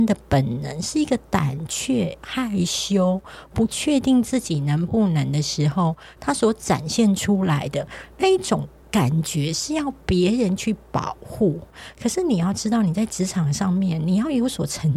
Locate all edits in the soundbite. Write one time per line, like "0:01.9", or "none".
none